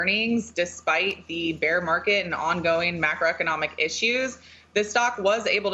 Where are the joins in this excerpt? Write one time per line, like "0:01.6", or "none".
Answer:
none